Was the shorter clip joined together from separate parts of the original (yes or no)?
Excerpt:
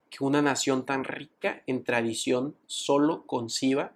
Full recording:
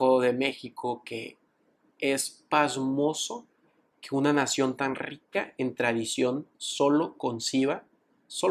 no